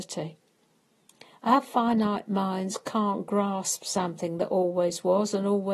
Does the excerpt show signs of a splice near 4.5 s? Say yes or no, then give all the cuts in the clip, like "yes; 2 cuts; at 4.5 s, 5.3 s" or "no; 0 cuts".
no; 0 cuts